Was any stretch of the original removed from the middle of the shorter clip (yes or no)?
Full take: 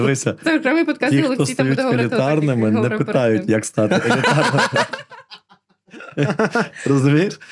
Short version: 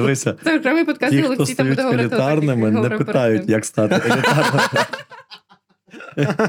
no